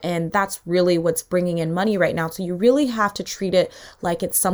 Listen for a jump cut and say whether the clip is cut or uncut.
uncut